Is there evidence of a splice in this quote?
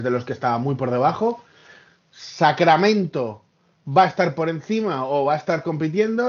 no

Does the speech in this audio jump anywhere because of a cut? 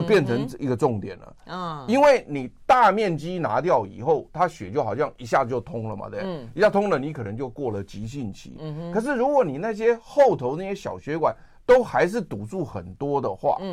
no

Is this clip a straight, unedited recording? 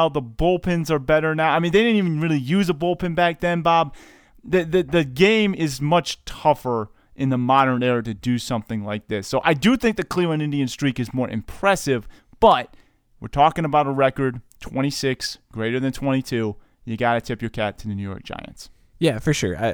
yes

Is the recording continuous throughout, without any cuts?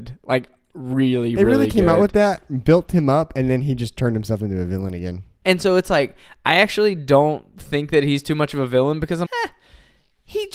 no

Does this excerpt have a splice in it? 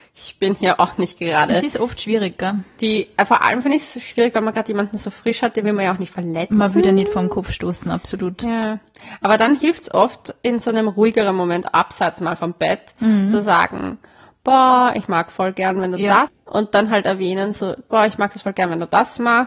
yes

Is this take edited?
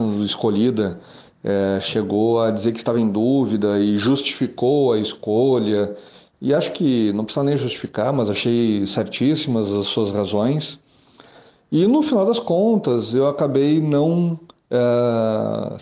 no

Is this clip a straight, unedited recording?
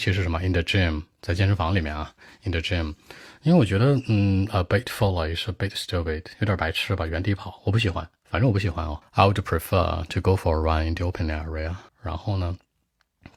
no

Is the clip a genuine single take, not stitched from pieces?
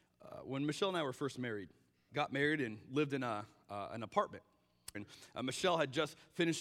no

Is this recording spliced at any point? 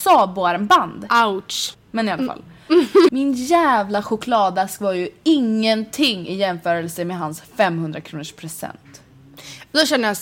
yes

